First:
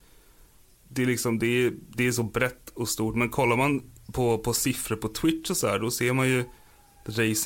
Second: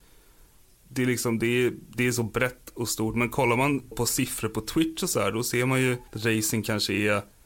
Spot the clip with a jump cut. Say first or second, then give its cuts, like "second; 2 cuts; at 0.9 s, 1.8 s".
second; 2 cuts; at 3.9 s, 6.1 s